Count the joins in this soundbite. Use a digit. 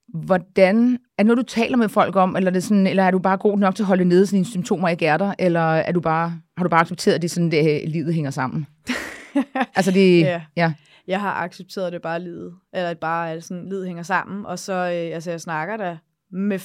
1